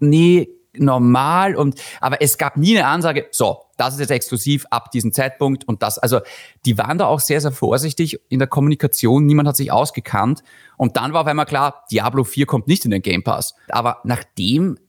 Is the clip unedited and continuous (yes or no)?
no